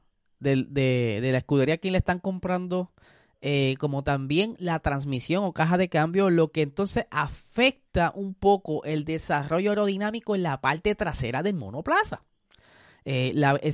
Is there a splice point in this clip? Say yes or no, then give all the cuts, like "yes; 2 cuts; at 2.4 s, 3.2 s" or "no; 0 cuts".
no; 0 cuts